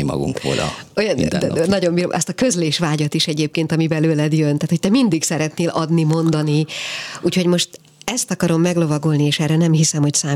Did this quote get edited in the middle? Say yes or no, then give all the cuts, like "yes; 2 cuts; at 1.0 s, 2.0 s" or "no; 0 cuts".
no; 0 cuts